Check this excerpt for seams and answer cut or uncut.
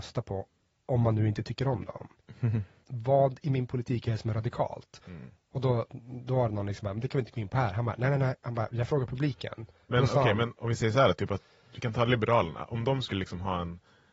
cut